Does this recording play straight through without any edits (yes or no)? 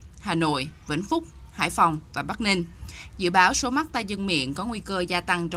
no